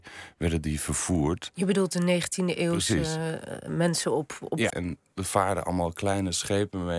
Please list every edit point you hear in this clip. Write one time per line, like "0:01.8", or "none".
0:03.7
0:04.7

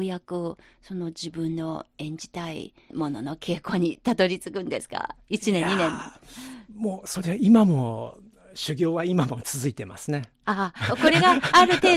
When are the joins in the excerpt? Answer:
none

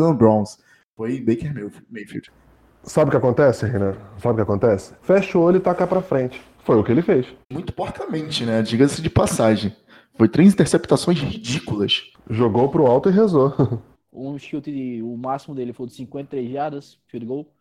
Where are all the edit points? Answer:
0:05.0
0:07.4
0:13.9

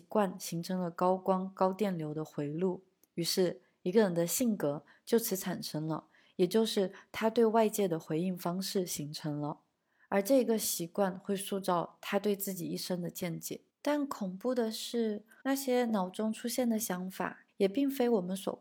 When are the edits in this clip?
0:13.7
0:15.4
0:17.5

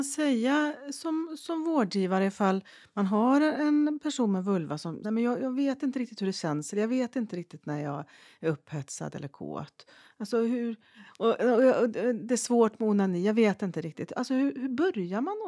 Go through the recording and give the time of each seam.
0:05.0

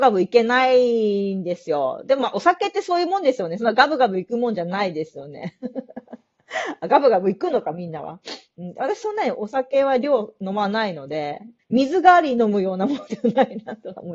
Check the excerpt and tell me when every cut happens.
0:11.6

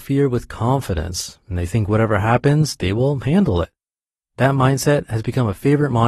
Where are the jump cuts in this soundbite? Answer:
none

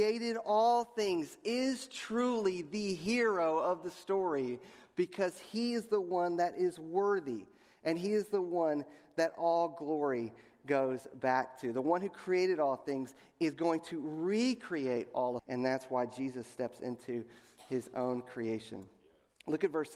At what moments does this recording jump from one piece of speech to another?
0:15.4

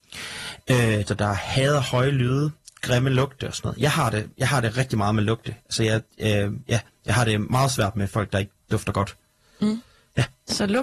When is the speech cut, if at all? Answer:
0:01.1

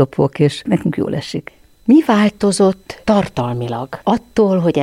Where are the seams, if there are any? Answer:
none

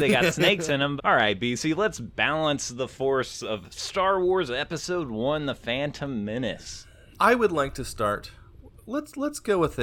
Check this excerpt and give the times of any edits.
0:01.0

